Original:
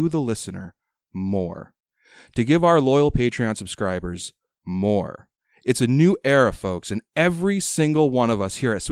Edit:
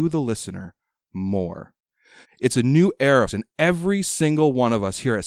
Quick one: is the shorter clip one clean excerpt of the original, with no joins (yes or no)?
no